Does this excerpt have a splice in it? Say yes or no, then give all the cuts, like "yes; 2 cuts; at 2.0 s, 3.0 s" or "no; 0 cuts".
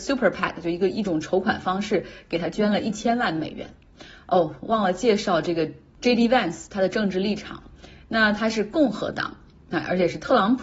no; 0 cuts